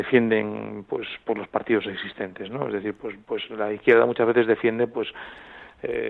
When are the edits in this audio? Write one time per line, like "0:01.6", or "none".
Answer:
none